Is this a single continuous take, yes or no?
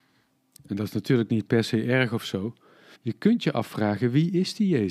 no